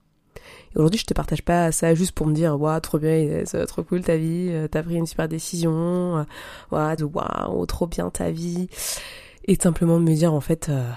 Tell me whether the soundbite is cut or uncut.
cut